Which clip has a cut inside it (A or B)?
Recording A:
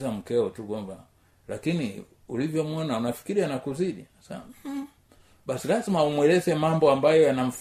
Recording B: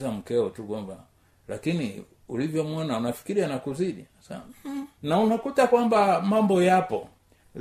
B